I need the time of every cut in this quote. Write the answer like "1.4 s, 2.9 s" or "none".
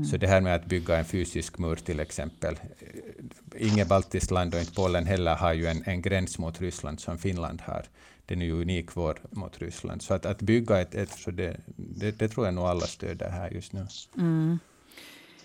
9.3 s, 11.2 s